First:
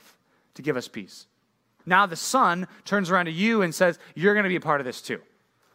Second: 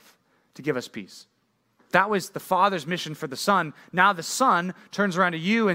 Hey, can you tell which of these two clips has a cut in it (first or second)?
first